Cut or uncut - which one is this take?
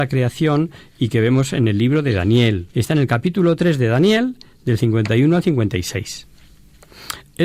cut